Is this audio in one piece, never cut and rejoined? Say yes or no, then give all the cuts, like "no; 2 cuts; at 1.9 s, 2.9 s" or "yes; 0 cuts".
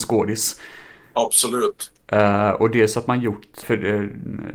no; 2 cuts; at 2.0 s, 3.6 s